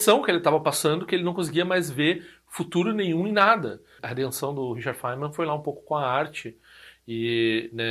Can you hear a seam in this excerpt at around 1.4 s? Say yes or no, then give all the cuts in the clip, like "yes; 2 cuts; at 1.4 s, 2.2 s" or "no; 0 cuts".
no; 1 cut; at 4.0 s